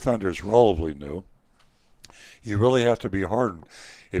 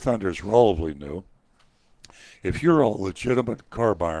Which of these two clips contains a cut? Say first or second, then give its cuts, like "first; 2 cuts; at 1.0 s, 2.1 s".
second; 1 cut; at 2.4 s